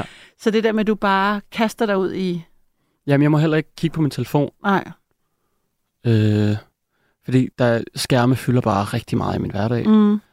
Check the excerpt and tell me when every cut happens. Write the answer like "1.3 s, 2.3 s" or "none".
7.5 s